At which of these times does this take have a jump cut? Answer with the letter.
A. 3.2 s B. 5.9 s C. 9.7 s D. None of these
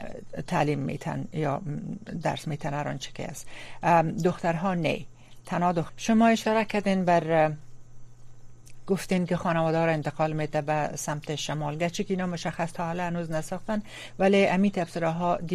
B